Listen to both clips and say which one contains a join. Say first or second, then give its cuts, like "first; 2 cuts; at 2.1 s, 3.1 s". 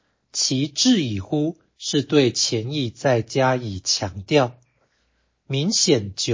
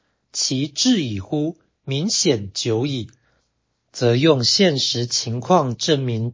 second; 1 cut; at 1.7 s